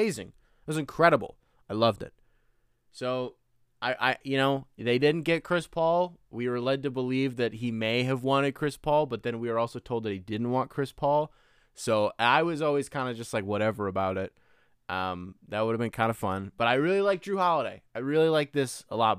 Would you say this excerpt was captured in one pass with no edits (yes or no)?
yes